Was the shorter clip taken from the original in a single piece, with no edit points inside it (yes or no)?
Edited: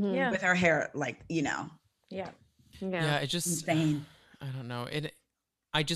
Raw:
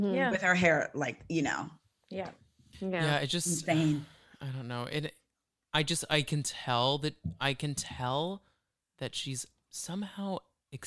yes